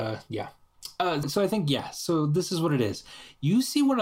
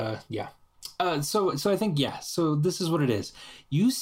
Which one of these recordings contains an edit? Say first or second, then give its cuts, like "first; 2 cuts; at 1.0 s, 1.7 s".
first; 1 cut; at 1.2 s